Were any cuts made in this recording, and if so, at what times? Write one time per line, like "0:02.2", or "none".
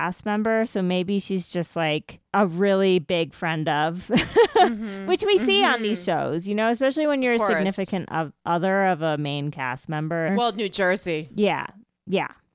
0:10.3